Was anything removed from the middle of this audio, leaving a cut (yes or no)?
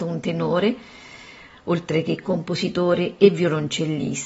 no